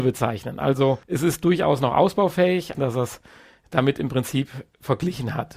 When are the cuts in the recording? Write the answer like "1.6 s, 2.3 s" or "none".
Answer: 1.0 s, 2.7 s

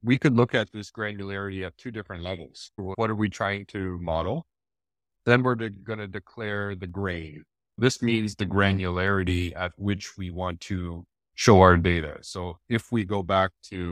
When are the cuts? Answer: 2.8 s

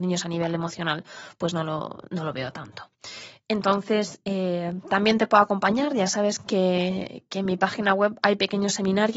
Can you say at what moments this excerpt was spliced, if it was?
none

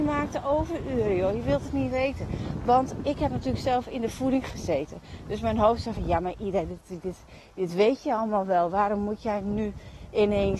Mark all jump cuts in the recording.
none

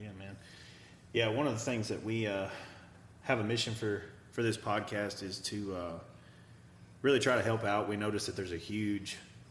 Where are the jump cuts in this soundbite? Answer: none

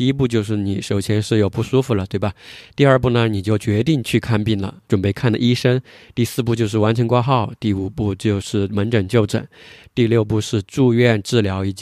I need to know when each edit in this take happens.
4.9 s

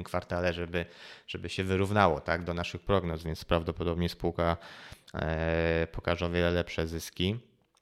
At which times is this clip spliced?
none

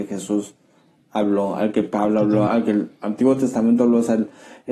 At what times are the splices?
2.5 s

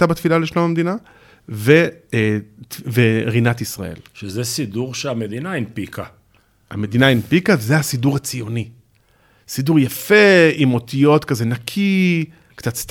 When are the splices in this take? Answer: none

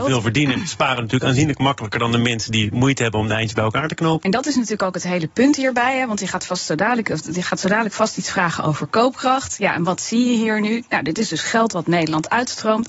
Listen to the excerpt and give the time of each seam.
4.2 s

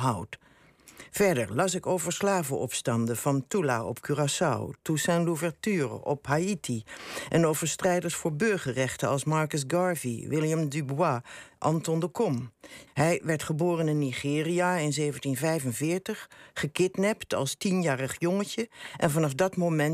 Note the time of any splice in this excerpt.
12.9 s

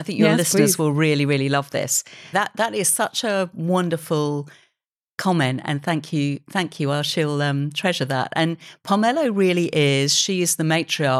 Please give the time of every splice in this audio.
2.3 s

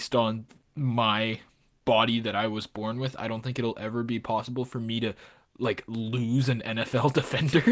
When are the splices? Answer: none

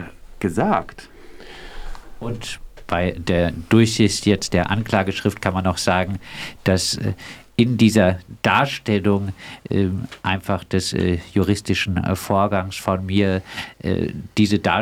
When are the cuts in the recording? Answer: none

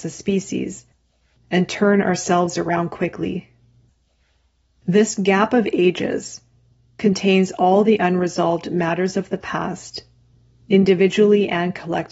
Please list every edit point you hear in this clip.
4.7 s

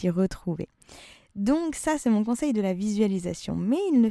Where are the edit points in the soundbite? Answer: none

